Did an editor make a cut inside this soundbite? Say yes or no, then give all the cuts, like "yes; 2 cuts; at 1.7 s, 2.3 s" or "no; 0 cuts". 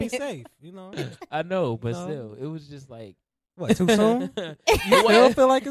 no; 0 cuts